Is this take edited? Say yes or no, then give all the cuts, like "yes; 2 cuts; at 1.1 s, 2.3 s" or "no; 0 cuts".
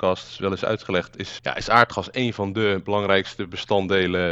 yes; 1 cut; at 1.4 s